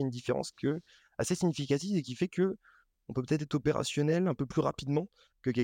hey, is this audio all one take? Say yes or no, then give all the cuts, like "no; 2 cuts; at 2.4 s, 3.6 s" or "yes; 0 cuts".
yes; 0 cuts